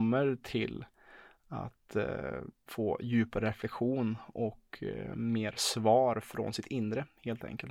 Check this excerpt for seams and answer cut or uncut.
cut